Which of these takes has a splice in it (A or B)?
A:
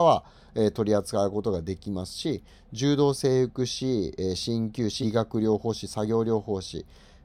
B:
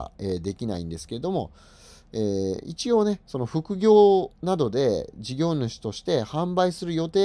A